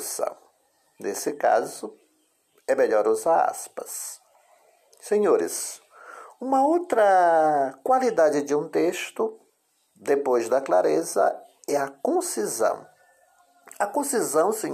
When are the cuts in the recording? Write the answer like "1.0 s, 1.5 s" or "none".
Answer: none